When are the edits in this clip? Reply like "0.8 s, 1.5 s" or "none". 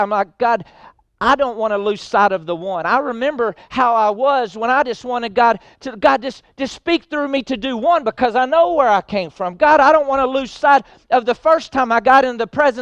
none